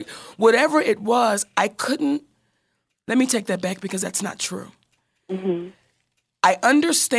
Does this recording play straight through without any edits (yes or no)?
yes